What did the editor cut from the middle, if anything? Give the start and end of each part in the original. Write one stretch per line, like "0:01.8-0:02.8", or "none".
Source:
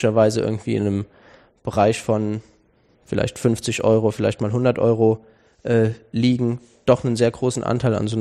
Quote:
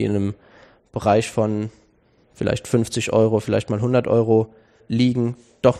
0:05.5-0:06.0